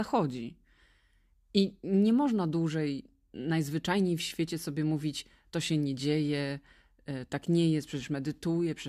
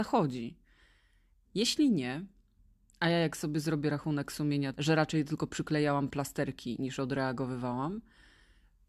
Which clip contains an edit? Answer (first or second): second